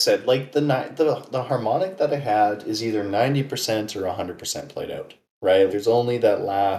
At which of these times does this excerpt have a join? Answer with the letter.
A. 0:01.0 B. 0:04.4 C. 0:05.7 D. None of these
C